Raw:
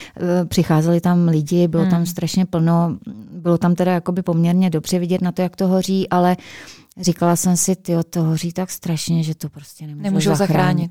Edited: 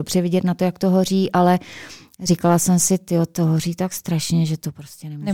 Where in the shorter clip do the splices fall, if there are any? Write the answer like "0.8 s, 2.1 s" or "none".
none